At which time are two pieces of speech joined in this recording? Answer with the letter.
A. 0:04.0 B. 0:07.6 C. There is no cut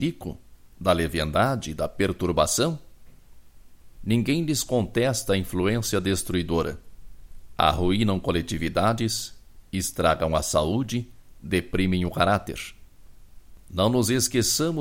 A